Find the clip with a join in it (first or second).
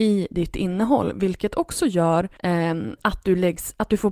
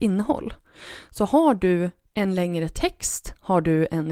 first